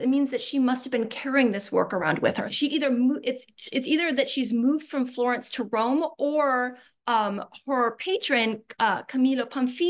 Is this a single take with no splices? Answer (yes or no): no